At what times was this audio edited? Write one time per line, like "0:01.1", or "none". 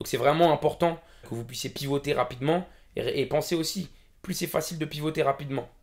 0:01.2
0:04.1